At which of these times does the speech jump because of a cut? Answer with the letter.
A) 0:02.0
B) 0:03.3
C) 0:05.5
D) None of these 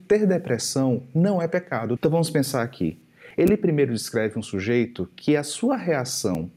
A